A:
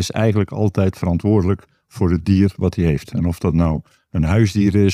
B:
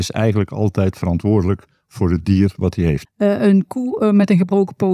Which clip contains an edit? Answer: B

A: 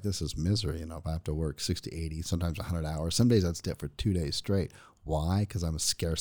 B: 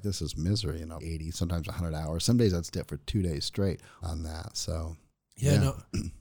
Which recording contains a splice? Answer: B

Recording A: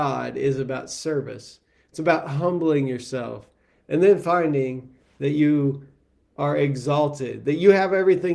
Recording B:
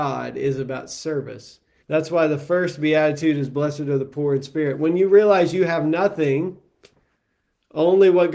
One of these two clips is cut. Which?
B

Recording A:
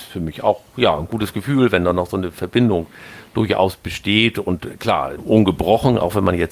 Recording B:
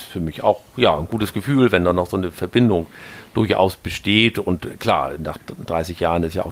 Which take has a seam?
A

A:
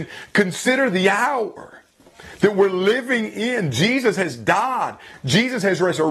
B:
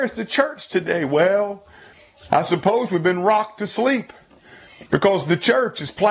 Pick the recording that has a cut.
B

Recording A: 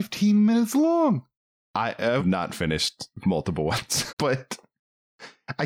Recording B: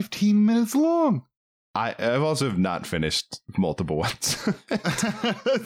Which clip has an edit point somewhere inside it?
A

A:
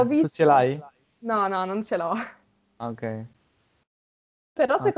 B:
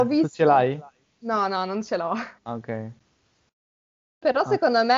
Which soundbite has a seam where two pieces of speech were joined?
B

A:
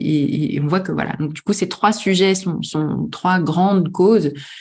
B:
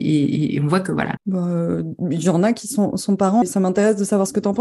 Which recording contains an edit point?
B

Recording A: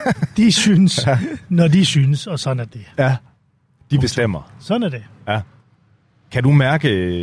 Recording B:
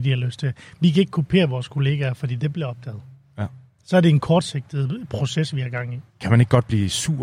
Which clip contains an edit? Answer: B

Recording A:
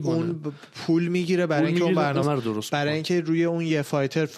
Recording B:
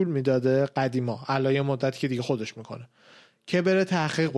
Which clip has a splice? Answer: A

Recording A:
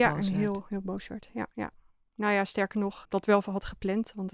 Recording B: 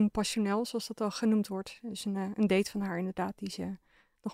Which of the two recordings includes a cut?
A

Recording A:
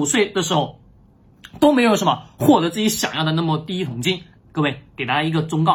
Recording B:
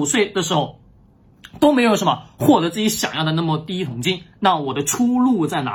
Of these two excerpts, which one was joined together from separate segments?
A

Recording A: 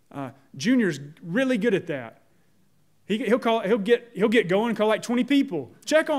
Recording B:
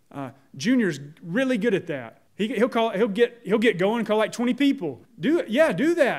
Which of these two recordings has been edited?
B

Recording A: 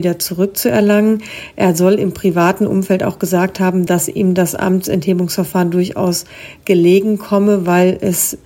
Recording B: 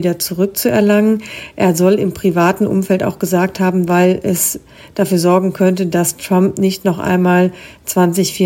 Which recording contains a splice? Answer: B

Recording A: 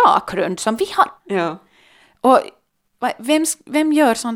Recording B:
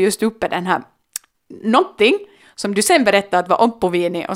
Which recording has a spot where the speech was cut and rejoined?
A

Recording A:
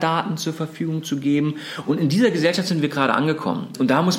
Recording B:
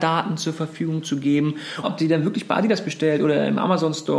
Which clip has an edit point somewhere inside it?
B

